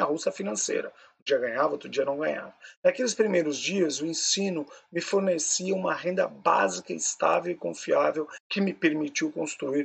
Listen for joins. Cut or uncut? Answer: uncut